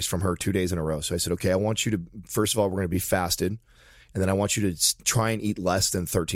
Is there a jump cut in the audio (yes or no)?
no